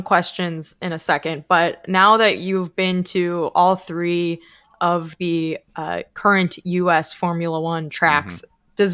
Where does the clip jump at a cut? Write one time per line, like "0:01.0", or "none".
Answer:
none